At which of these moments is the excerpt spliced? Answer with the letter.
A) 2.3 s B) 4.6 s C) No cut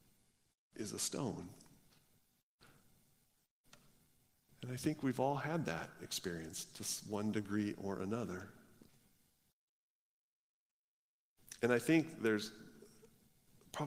C